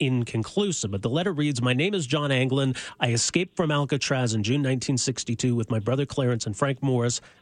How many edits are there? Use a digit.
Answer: 0